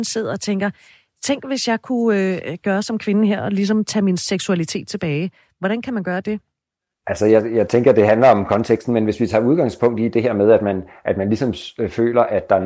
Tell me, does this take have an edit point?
no; 0 cuts

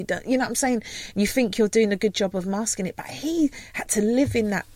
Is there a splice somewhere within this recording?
no; 0 cuts

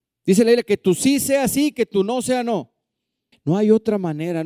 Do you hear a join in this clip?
yes; 1 cut; at 3.3 s

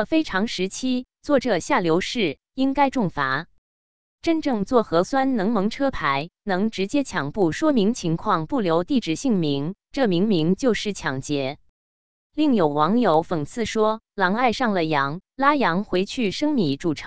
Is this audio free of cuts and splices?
yes; 0 cuts

